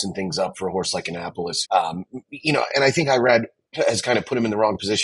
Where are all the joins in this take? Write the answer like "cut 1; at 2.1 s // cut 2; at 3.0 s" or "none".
cut 1; at 1.6 s // cut 2; at 2.7 s